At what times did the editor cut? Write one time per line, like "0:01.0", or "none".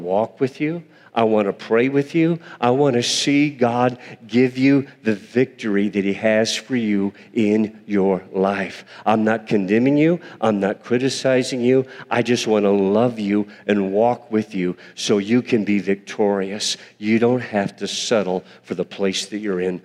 none